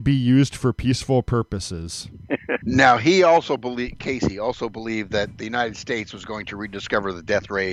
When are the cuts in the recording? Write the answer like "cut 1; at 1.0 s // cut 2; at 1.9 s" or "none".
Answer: cut 1; at 2.6 s